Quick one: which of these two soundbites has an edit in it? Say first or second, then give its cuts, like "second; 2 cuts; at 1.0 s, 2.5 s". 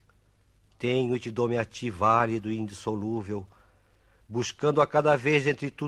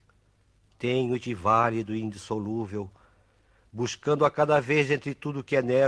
second; 1 cut; at 1.3 s